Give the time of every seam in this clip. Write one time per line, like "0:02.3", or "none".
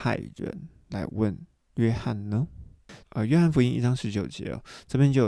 0:03.0